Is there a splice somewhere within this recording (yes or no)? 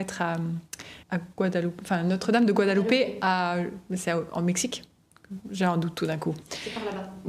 yes